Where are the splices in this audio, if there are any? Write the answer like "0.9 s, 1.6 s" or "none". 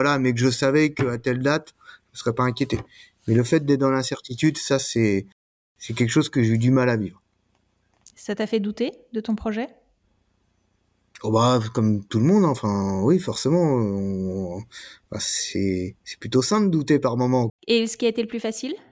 17.5 s